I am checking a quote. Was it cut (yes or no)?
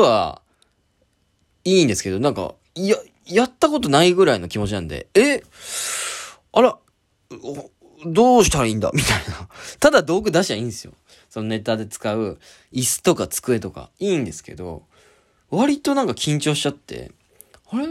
yes